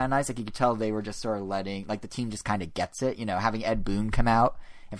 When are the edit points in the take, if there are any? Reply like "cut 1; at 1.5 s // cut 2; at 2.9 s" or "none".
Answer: none